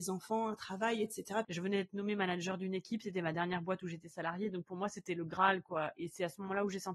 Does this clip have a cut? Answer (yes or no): yes